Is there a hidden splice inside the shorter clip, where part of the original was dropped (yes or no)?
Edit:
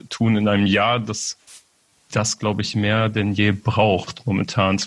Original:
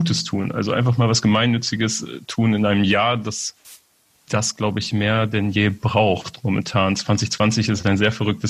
no